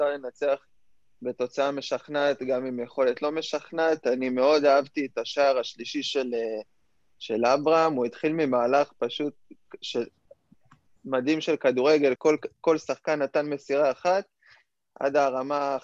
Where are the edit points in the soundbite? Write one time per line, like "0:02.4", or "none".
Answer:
0:12.2